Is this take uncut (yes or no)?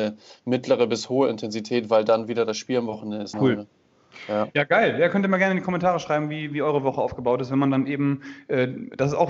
no